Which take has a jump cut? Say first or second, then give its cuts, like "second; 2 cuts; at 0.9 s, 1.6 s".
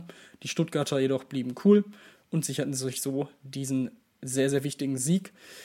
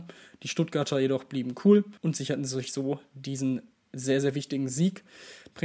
second; 1 cut; at 2.0 s